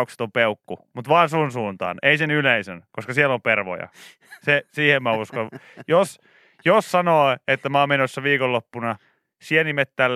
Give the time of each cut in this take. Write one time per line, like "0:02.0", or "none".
none